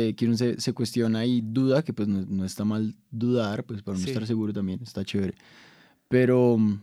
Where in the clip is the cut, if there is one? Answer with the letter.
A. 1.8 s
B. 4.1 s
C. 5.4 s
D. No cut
D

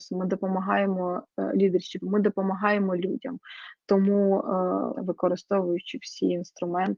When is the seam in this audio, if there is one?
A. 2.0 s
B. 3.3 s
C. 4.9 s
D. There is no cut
C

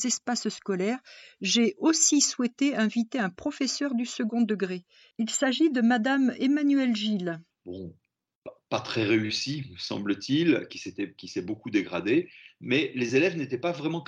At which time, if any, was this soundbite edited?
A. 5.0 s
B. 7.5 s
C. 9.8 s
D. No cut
B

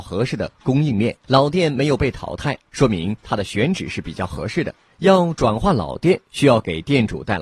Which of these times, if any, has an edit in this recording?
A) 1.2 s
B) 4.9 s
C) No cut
A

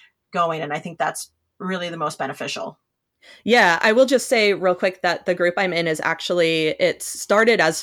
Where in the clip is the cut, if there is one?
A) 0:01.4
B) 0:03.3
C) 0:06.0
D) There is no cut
D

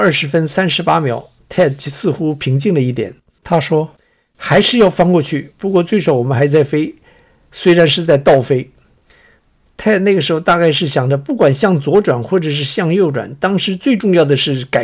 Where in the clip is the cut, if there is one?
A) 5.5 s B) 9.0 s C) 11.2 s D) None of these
B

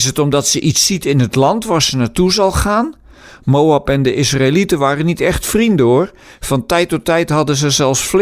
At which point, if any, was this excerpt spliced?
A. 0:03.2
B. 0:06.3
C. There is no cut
C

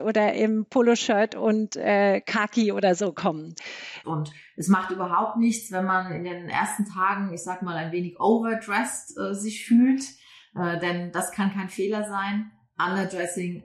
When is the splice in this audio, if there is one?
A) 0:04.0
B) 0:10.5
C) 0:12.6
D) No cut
A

